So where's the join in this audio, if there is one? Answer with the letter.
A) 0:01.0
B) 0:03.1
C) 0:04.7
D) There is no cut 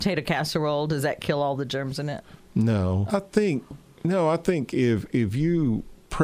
B